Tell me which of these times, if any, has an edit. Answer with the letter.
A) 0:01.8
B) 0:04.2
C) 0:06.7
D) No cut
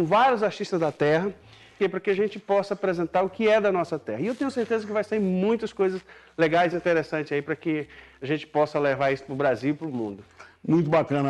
A